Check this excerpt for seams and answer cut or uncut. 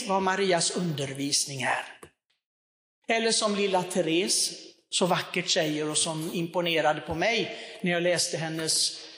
cut